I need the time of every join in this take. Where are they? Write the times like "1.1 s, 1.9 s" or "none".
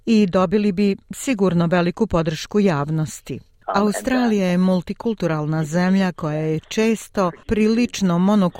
3.6 s